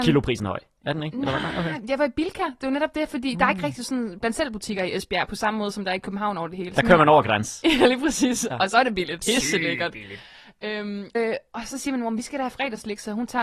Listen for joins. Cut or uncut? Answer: cut